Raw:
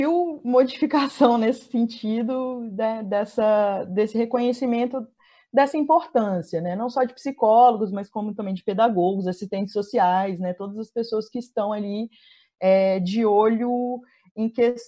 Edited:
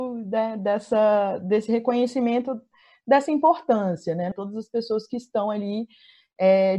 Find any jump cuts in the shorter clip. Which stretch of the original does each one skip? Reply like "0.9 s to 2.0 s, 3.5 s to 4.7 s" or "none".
6.8 s to 10.5 s